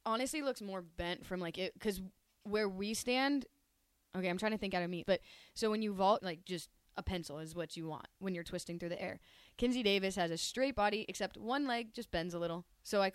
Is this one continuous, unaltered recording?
no; 2 cuts; at 5.0 s, 6.2 s

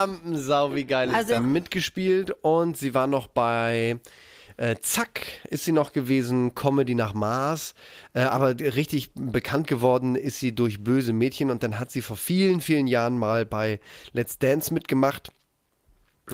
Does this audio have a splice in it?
yes; 1 cut; at 1.4 s

